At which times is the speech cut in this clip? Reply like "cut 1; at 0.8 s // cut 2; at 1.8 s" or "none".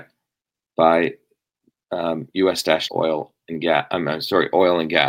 cut 1; at 2.9 s